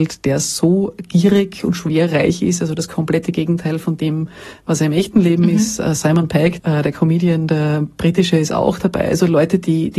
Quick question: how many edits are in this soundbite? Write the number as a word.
one